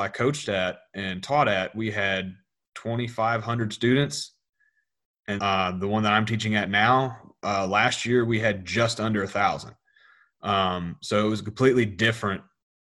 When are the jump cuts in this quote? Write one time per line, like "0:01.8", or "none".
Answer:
0:05.4